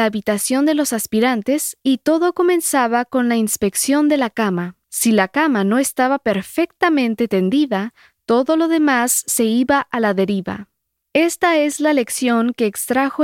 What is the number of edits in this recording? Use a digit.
1